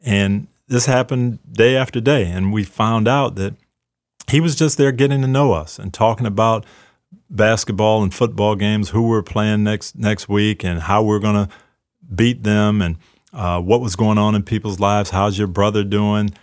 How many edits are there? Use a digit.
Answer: 0